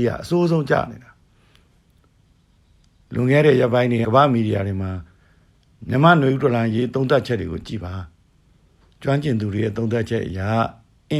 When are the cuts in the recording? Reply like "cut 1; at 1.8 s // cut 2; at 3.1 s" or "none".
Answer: cut 1; at 4.0 s